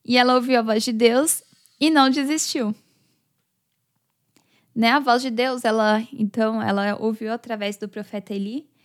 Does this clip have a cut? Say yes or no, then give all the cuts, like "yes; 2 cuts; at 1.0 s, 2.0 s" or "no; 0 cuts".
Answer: no; 0 cuts